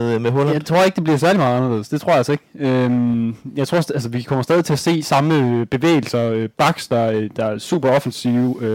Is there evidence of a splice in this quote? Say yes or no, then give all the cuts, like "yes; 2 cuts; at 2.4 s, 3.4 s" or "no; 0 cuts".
no; 0 cuts